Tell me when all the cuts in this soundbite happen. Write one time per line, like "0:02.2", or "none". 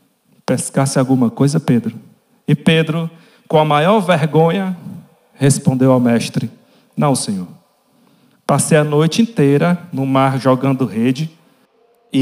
none